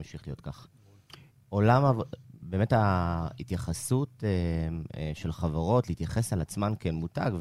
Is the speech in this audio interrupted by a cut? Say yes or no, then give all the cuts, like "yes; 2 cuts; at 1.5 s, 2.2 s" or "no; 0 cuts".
yes; 2 cuts; at 1.3 s, 2.4 s